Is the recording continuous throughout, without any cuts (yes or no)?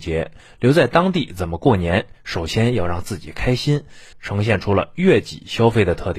no